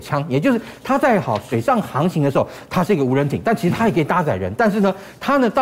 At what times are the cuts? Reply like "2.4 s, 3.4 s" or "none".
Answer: none